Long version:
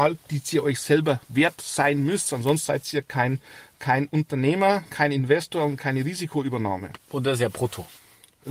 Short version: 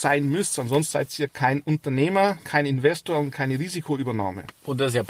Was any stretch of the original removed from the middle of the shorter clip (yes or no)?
yes